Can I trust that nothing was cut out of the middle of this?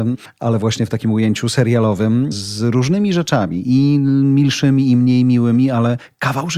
yes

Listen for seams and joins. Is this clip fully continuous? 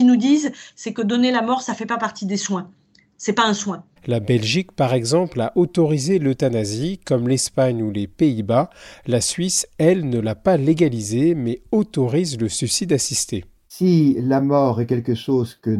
no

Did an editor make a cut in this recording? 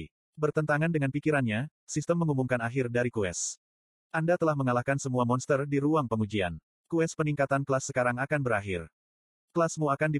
no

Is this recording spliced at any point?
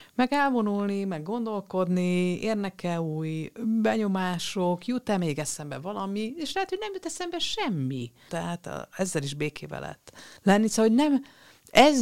yes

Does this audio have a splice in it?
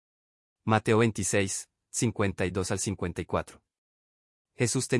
no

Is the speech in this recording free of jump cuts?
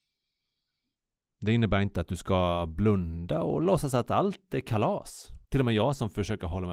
no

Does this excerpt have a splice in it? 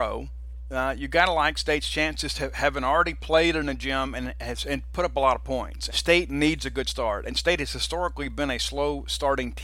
yes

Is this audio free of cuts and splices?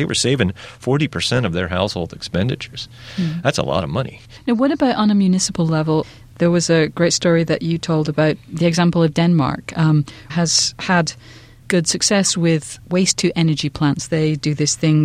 no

